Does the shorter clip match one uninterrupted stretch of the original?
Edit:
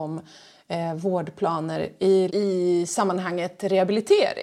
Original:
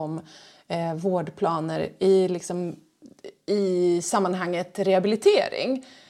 no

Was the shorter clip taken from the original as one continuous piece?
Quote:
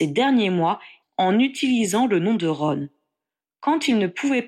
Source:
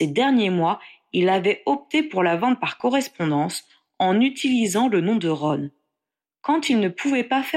no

